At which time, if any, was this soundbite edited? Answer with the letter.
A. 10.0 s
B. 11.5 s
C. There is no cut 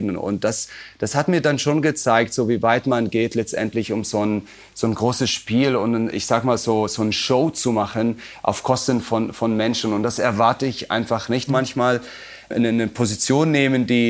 B